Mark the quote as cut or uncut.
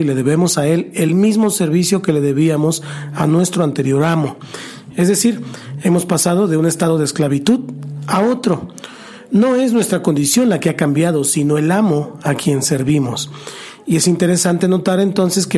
uncut